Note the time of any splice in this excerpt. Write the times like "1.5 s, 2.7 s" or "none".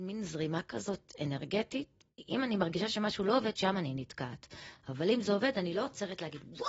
none